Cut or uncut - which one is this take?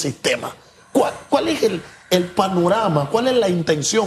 uncut